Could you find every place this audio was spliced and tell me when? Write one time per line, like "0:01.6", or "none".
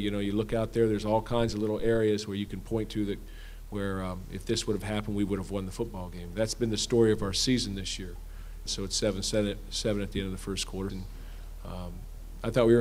0:08.7
0:10.9